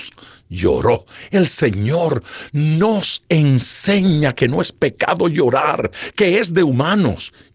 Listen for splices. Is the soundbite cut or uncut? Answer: cut